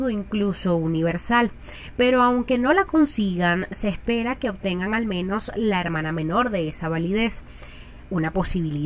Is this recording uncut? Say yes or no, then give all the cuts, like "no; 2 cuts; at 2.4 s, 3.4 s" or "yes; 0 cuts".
yes; 0 cuts